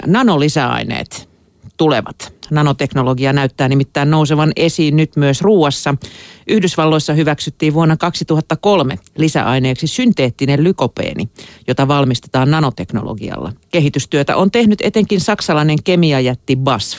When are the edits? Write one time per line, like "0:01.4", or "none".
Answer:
0:13.6

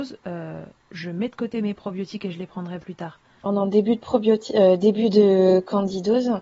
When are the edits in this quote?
0:03.5

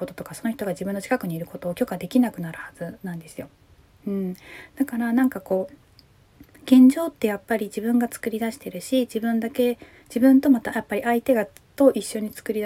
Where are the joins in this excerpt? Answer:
none

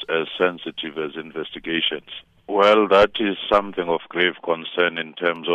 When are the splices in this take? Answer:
0:02.4

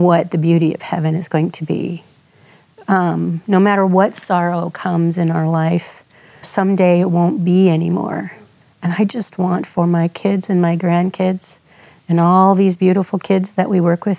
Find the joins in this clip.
0:06.4

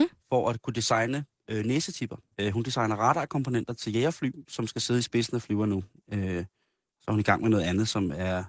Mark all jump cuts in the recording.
0:02.3
0:06.0

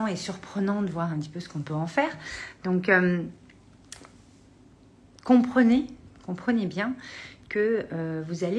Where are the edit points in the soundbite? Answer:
none

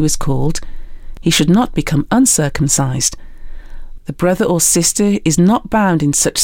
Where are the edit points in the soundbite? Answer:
0:04.0

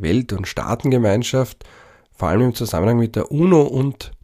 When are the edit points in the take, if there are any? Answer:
none

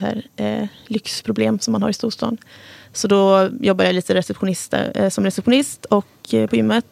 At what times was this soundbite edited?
none

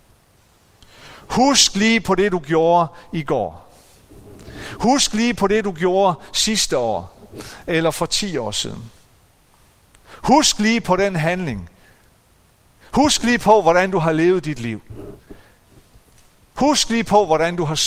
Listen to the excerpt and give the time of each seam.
none

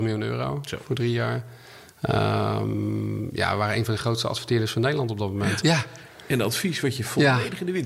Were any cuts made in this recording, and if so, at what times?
0:05.6

